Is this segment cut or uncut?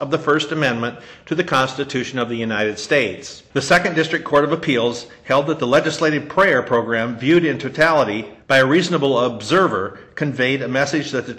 cut